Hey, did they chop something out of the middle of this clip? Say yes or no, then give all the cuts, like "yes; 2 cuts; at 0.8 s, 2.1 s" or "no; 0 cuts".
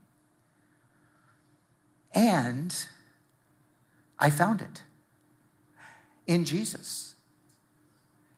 no; 0 cuts